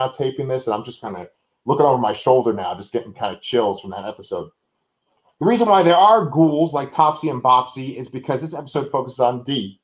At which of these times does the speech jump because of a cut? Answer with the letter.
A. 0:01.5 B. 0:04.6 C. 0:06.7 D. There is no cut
D